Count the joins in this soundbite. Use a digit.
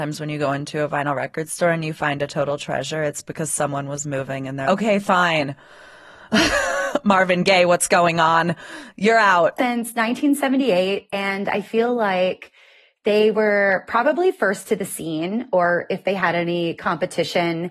2